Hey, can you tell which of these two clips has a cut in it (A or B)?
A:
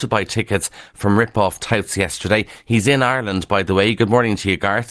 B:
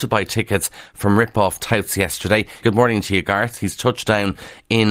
B